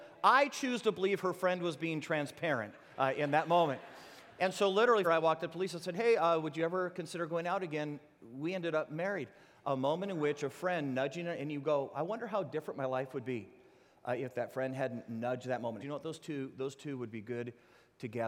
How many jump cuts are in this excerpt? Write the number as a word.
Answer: two